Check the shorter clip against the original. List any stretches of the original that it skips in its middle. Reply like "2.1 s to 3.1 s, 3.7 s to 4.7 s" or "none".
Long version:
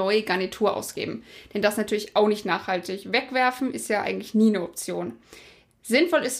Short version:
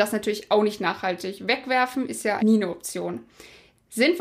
4.0 s to 4.3 s